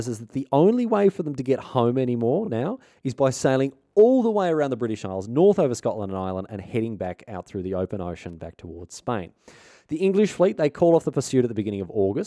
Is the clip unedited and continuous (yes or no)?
yes